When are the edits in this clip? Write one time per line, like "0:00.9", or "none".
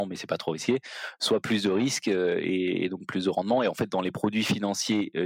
none